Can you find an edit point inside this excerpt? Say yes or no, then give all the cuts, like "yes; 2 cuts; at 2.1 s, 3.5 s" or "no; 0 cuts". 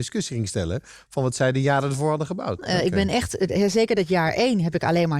yes; 1 cut; at 2.6 s